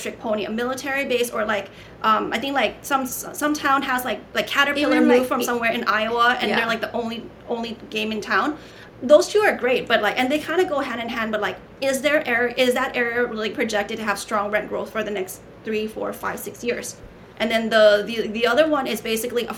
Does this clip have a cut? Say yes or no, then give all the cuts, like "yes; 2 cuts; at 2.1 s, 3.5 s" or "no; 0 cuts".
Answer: yes; 2 cuts; at 8.9 s, 13.5 s